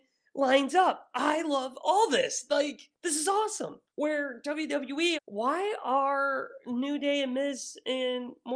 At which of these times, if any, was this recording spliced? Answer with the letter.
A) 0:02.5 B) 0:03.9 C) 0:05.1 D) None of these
C